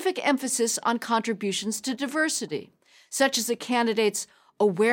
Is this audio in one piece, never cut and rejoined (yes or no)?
yes